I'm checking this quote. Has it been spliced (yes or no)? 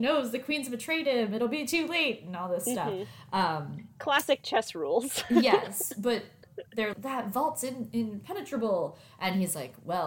yes